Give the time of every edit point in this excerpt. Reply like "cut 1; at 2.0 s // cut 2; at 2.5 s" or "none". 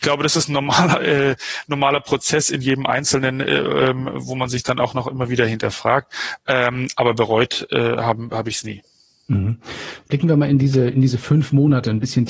none